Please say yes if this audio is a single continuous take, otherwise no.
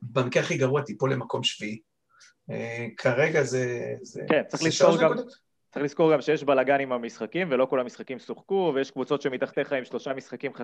yes